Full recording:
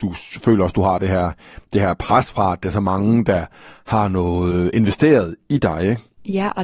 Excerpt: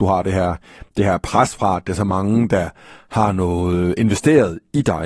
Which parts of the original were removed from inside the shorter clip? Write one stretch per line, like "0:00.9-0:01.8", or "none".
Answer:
none